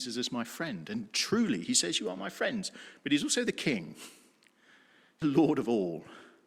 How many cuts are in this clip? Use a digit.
1